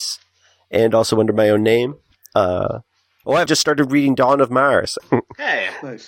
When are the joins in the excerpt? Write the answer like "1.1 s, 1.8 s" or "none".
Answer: 3.5 s, 5.0 s

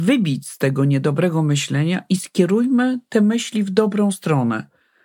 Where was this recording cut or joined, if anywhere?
none

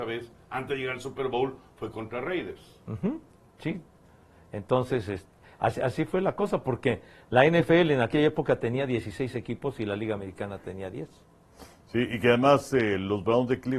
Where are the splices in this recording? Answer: none

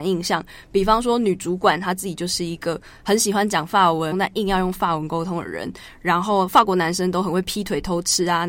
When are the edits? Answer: 4.1 s

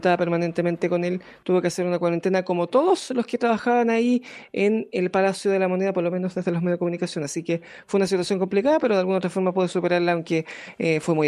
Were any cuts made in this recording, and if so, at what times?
none

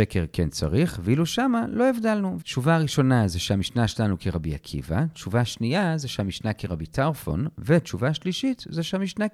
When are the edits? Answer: 2.4 s

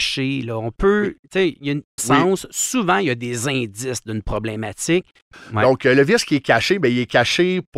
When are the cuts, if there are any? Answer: 2.0 s, 5.3 s

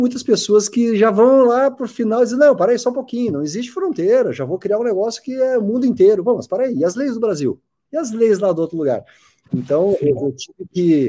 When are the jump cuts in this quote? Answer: 7.9 s

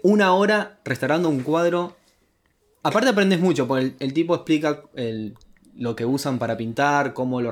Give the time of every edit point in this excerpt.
none

